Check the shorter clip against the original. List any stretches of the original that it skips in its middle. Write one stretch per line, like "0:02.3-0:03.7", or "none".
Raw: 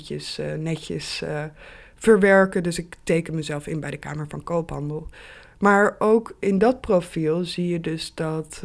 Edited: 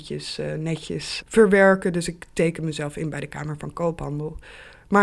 0:01.2-0:01.9